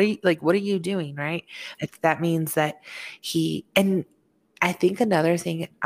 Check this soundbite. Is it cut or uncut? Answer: cut